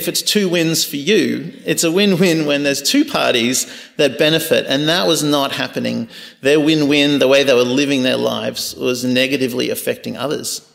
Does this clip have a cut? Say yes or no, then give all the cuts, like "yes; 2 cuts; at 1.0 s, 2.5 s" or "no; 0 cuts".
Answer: no; 0 cuts